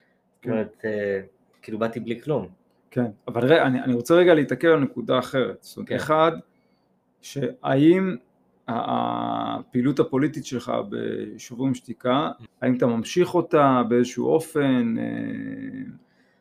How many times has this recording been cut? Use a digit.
1